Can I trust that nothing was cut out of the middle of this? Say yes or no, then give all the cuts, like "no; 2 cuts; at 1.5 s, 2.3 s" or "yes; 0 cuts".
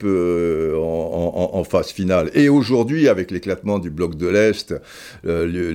yes; 0 cuts